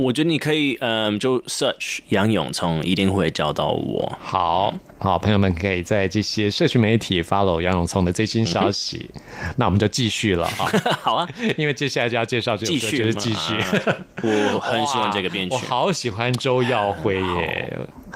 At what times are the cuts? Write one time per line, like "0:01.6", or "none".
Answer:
none